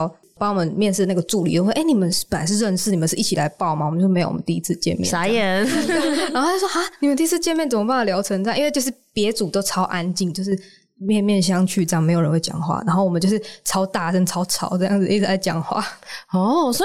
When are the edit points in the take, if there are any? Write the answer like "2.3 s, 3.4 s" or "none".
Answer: none